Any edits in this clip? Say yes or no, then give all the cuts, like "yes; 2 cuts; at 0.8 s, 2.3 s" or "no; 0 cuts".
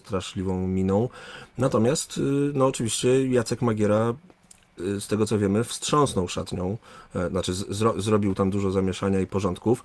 no; 0 cuts